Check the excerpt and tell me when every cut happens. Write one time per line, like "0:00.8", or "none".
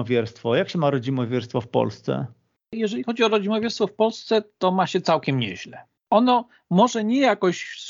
none